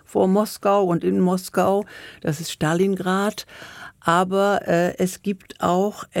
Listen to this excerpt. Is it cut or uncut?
uncut